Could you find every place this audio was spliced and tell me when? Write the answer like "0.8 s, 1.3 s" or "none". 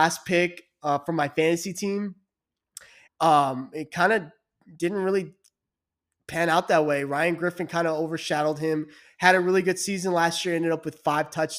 3.1 s